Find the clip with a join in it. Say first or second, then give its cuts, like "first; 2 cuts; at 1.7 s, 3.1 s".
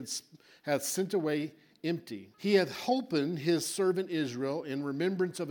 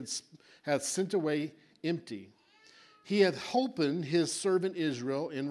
first; 1 cut; at 2.3 s